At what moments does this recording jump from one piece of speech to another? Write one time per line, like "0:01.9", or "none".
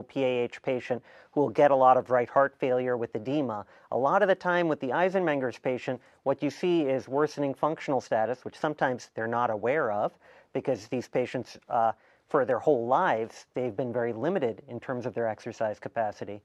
none